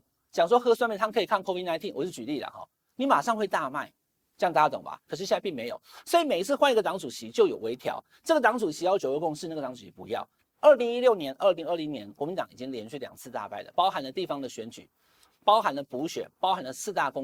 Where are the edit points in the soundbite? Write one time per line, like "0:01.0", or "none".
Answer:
0:05.1
0:10.4